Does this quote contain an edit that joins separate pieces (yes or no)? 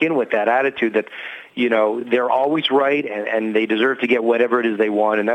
no